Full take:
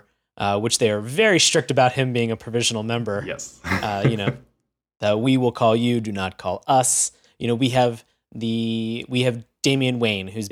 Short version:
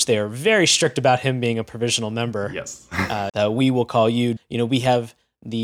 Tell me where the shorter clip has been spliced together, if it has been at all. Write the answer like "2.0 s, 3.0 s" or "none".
3.3 s, 4.4 s